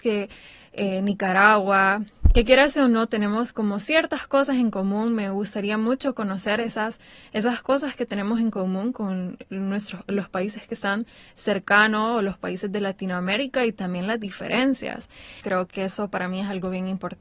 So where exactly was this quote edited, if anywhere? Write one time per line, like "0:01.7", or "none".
0:15.4